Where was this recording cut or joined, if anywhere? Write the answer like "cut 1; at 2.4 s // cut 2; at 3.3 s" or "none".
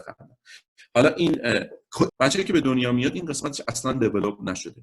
cut 1; at 2.1 s